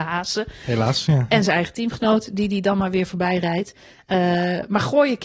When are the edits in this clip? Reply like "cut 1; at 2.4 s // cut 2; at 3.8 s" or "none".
none